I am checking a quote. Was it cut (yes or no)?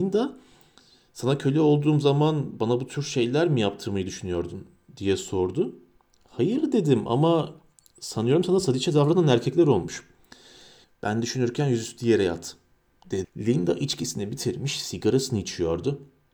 yes